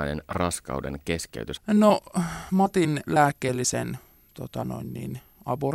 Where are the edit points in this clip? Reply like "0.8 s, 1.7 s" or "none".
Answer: 1.6 s